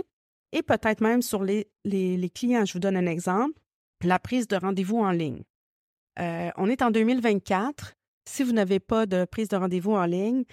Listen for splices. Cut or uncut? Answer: uncut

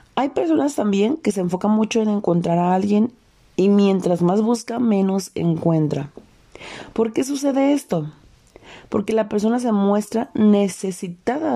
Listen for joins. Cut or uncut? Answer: uncut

